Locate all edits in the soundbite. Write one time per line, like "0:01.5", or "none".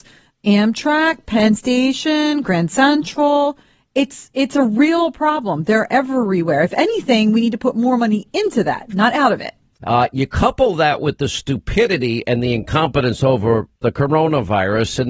0:09.8
0:13.8